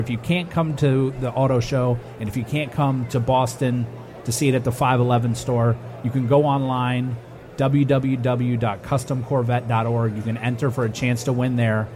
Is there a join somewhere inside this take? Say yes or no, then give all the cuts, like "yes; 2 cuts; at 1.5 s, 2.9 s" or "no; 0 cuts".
no; 0 cuts